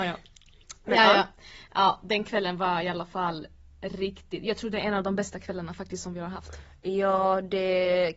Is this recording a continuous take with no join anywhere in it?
yes; 0 cuts

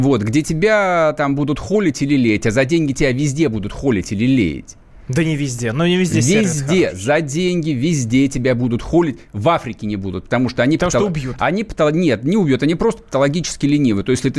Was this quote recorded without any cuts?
yes; 0 cuts

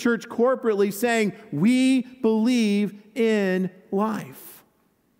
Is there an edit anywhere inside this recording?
no; 0 cuts

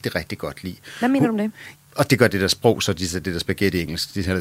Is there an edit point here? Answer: yes; 1 cut; at 1.7 s

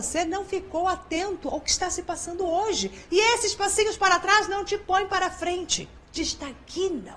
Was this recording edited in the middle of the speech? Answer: yes; 1 cut; at 3.1 s

